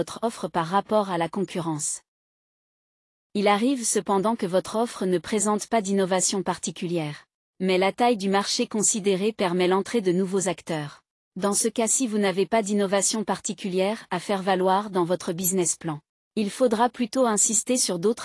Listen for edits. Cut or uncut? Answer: uncut